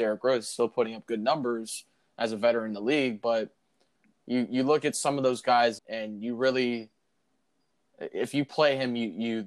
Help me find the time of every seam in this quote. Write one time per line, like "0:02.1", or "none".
0:05.8